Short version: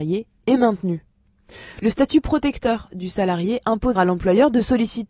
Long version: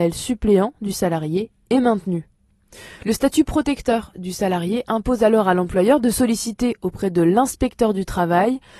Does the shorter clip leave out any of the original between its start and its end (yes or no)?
yes